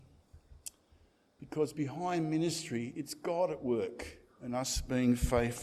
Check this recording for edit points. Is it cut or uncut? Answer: uncut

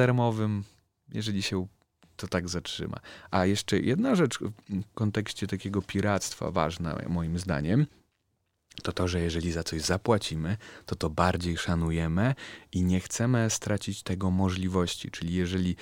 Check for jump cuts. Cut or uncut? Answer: uncut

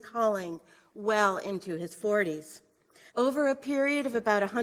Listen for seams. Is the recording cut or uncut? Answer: cut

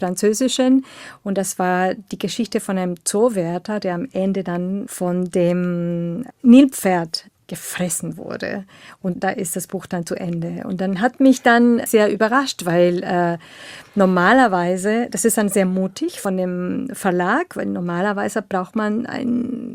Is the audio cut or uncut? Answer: cut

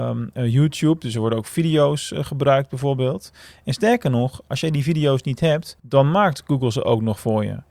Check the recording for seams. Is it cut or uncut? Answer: cut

